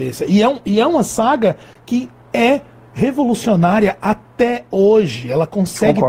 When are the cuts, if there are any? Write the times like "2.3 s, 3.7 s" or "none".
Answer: none